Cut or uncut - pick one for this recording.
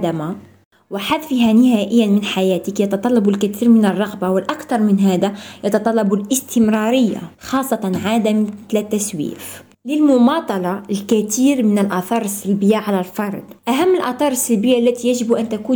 cut